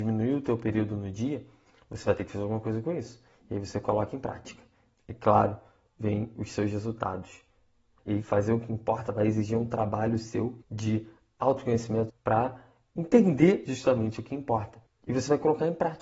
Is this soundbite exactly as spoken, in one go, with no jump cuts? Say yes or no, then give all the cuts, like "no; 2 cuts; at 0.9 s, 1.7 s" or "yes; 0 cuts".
no; 3 cuts; at 8.0 s, 10.6 s, 12.1 s